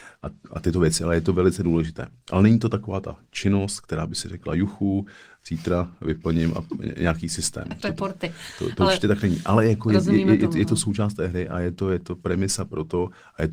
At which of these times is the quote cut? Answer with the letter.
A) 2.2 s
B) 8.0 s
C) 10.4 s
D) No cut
B